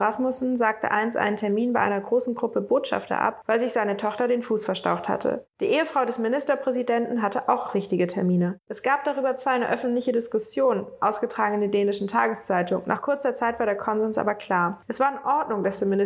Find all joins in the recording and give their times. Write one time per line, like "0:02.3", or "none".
none